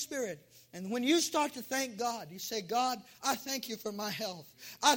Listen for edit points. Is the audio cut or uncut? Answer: uncut